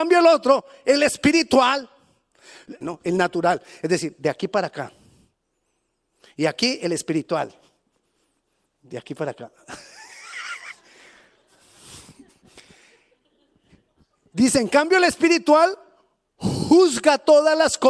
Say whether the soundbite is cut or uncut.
cut